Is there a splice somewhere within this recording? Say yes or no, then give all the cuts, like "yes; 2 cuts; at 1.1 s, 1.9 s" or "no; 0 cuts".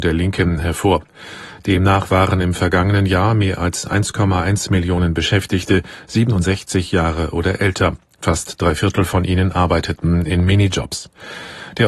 no; 0 cuts